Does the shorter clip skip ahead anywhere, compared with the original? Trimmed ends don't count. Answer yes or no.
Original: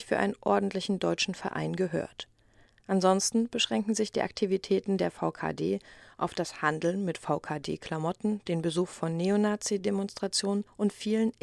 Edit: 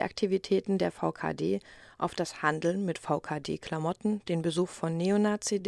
no